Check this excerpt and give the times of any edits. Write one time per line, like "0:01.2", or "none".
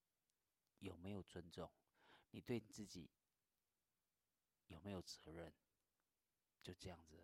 none